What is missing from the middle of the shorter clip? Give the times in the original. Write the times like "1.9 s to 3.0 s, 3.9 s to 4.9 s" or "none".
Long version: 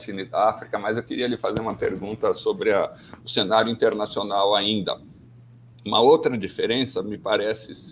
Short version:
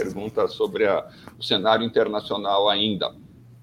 none